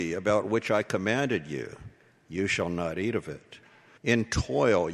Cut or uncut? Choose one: cut